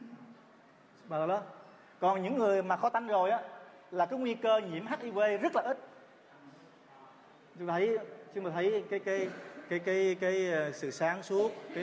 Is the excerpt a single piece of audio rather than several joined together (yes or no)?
no